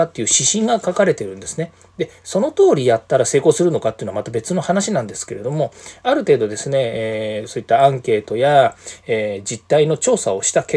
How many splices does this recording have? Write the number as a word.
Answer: zero